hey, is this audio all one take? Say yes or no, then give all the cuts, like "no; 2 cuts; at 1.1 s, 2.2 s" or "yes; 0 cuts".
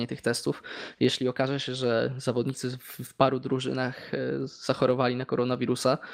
yes; 0 cuts